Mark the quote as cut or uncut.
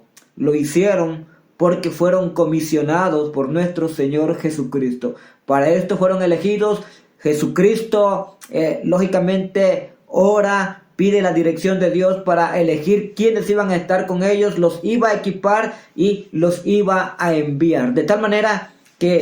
uncut